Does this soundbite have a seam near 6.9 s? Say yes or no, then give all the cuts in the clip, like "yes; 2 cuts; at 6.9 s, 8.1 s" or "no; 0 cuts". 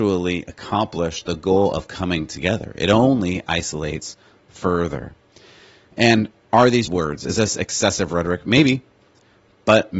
yes; 1 cut; at 6.9 s